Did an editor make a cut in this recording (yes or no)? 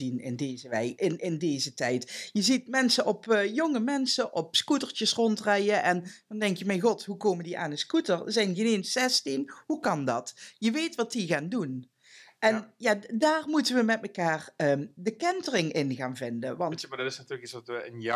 no